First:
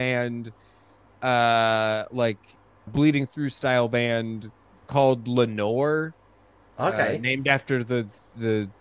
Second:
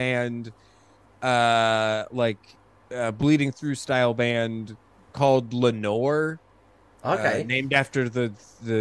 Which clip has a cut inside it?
first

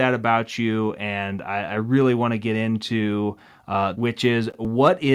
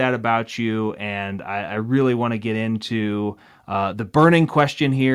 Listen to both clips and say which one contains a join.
first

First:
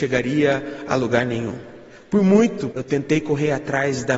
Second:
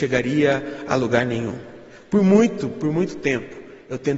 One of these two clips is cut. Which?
first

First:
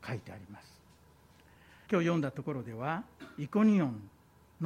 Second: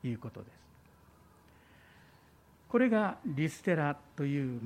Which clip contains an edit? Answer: first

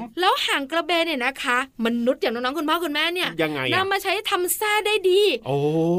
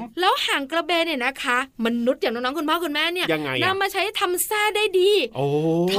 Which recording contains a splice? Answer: second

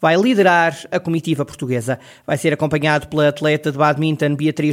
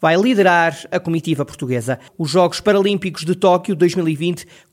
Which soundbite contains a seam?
second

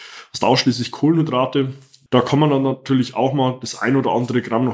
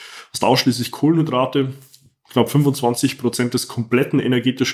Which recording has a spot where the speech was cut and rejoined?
first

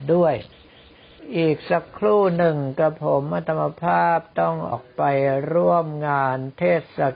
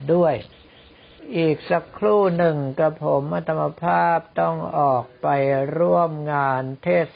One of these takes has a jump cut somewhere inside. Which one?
first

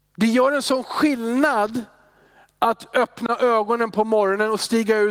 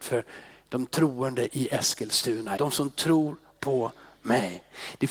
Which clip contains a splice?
second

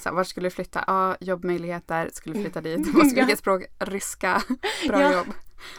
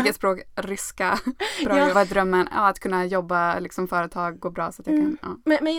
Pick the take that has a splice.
second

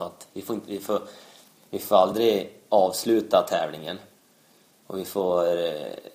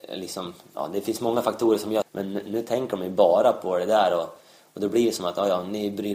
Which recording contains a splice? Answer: second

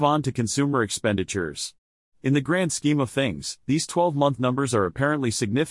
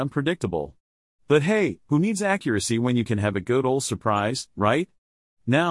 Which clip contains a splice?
first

